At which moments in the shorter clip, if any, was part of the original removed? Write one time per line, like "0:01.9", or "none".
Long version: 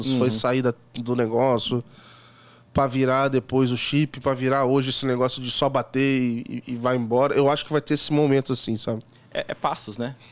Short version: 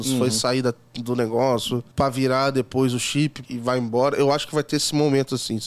0:01.9
0:03.4